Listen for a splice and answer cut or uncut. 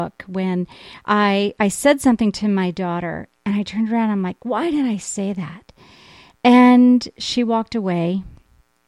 uncut